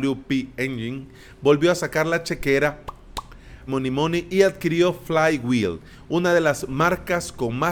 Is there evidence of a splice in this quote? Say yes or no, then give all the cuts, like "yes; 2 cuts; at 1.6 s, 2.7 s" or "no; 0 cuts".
yes; 1 cut; at 3.7 s